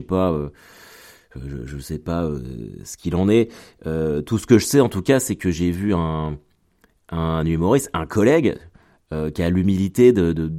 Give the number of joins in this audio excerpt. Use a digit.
0